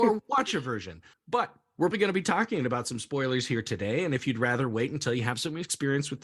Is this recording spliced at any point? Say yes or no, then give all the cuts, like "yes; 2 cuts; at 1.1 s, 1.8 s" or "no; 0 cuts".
yes; 1 cut; at 1.9 s